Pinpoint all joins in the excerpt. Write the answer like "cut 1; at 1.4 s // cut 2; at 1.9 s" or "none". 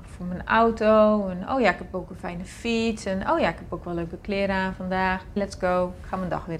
cut 1; at 5.4 s